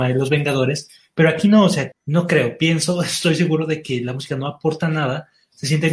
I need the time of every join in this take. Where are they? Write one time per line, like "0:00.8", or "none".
0:01.9